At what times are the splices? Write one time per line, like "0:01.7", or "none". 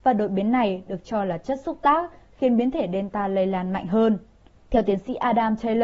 0:04.6